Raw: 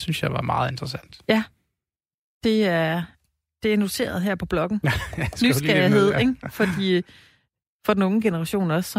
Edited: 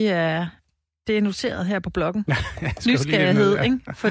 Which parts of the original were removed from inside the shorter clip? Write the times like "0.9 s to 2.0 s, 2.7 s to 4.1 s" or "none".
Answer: none

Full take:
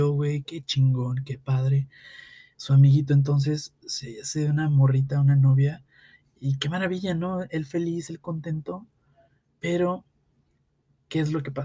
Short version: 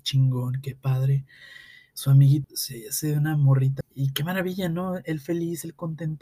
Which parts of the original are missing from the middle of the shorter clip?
3.1 s to 3.8 s, 5.1 s to 6.3 s

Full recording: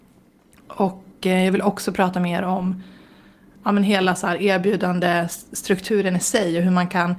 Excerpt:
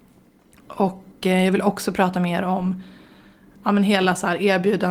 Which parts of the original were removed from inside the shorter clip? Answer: none

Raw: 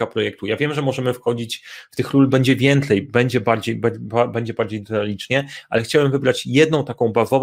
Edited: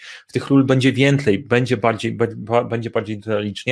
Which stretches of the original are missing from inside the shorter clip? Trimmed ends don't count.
none

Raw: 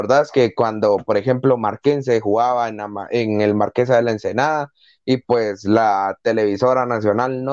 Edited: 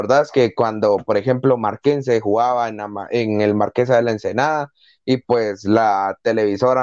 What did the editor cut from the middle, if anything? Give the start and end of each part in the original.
none

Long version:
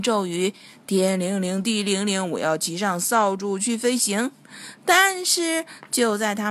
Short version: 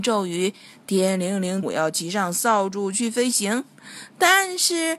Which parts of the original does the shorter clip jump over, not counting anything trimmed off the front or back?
1.6 s to 2.3 s

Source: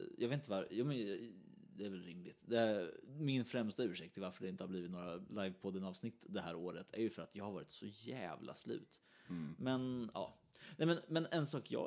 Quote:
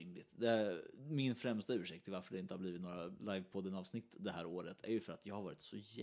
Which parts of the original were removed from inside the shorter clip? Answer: none

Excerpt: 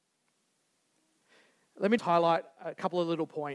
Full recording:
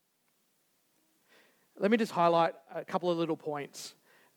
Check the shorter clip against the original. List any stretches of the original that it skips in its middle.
2.0 s to 2.1 s

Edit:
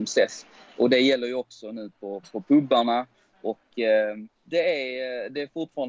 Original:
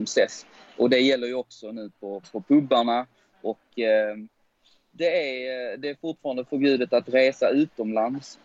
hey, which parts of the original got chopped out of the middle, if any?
4.3 s to 4.8 s

